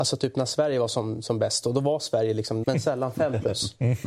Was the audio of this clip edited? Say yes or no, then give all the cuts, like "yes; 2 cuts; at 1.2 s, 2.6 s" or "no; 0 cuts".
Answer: yes; 1 cut; at 2.6 s